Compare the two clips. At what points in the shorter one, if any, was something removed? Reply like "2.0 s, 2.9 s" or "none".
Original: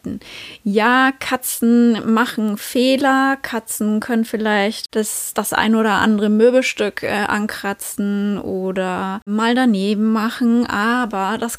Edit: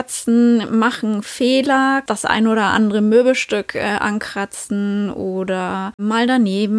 2.1 s